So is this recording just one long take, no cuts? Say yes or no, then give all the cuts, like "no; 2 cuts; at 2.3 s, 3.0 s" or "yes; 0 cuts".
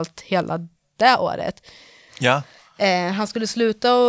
no; 1 cut; at 2.1 s